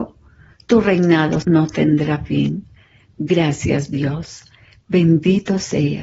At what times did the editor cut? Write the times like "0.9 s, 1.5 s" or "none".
1.4 s